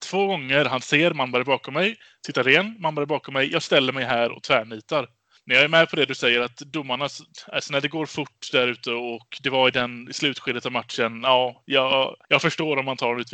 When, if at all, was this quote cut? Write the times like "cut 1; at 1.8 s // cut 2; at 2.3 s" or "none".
cut 1; at 12.2 s